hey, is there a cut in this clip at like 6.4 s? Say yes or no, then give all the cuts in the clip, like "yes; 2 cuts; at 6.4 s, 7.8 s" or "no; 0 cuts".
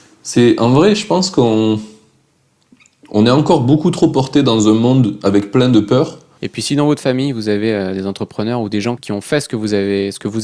yes; 2 cuts; at 6.4 s, 9.0 s